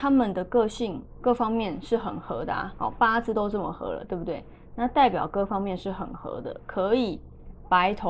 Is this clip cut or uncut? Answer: uncut